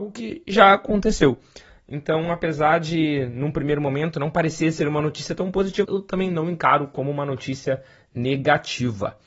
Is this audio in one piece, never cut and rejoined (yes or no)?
no